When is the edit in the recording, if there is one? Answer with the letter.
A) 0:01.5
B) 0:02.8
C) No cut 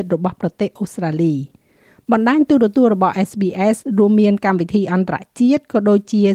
C